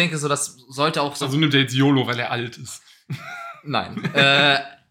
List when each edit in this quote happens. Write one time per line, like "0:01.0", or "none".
none